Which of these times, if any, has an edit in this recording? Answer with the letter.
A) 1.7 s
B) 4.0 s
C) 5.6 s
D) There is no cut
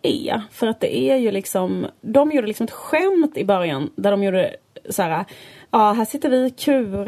D